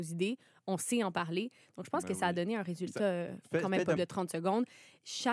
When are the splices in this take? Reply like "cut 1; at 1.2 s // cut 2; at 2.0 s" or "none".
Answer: cut 1; at 4.0 s